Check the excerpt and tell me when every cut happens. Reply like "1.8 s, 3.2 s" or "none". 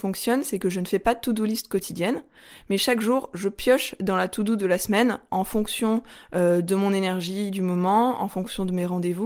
none